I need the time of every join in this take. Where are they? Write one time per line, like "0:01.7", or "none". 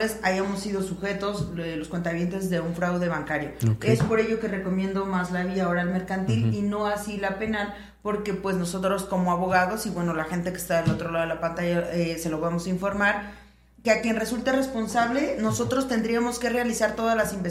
none